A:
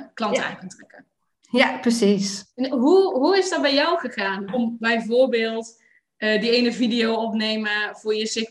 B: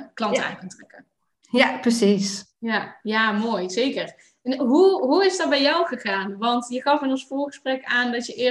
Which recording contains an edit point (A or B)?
A